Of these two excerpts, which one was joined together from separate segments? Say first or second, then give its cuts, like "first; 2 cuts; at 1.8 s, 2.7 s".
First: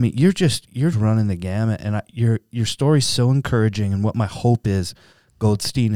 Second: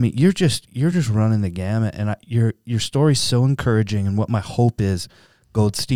first; 1 cut; at 0.9 s